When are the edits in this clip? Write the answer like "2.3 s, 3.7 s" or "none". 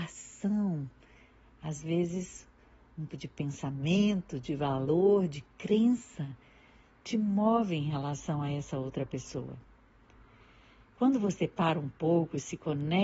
3.1 s